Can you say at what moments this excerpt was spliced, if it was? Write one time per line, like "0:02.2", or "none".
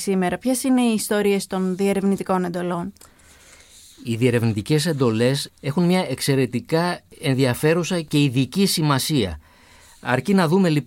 none